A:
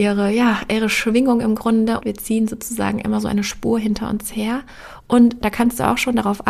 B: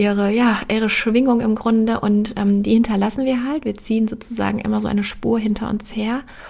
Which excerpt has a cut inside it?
A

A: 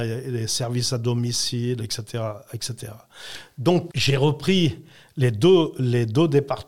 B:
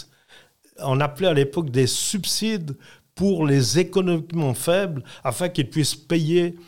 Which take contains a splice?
A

